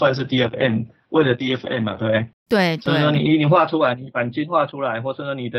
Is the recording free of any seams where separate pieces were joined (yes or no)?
yes